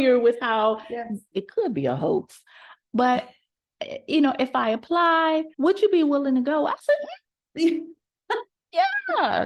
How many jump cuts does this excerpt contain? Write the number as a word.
two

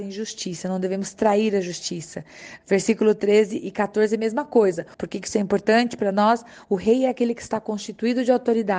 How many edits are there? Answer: one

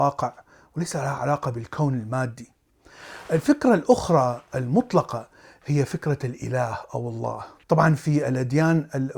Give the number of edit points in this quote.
one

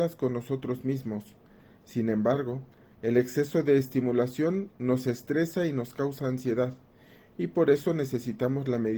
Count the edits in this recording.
zero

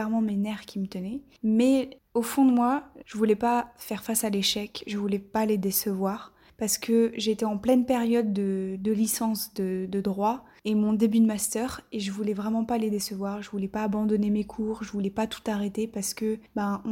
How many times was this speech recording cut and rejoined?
one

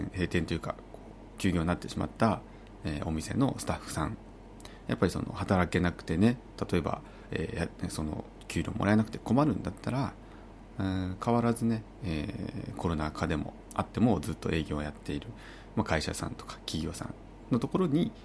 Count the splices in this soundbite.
zero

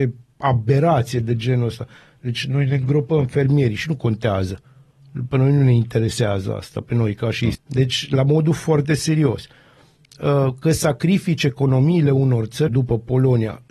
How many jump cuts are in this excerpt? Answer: two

